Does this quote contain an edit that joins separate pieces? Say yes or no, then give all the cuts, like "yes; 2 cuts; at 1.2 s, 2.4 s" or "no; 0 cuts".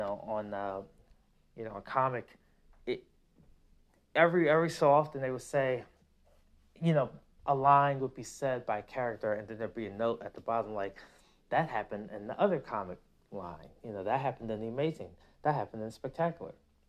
no; 0 cuts